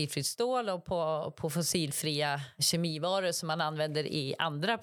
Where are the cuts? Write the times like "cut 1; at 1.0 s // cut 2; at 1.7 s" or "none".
cut 1; at 2.6 s